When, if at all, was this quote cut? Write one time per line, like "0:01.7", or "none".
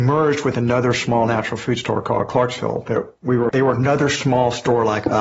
0:03.5